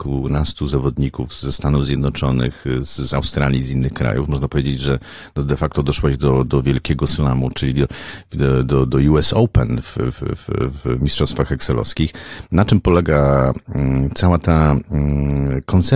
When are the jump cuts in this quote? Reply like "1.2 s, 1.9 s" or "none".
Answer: none